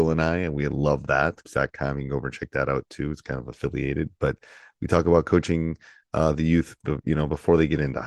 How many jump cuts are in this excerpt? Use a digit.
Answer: 1